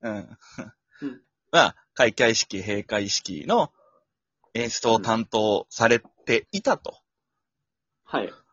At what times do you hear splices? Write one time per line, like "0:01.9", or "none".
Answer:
0:01.2